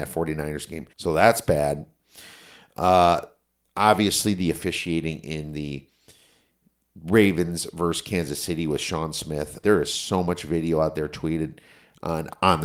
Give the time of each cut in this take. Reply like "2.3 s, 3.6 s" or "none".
0.9 s, 9.6 s